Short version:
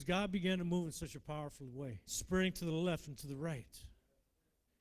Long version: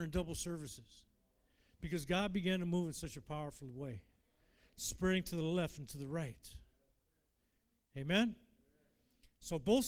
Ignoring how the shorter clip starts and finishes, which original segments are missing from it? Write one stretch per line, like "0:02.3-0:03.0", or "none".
0:04.0-0:04.7